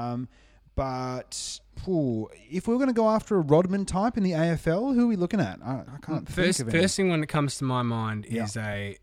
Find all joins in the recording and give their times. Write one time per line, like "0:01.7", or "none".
0:05.9